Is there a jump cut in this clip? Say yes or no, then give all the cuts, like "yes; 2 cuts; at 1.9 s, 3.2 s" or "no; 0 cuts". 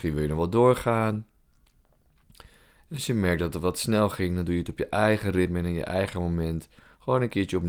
no; 0 cuts